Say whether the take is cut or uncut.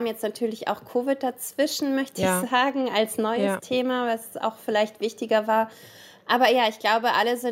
uncut